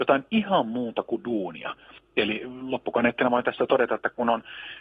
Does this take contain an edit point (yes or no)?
yes